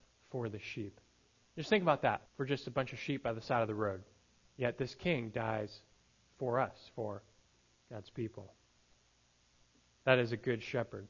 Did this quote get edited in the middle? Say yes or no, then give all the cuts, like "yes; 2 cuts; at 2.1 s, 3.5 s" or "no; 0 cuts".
yes; 2 cuts; at 2.3 s, 4.4 s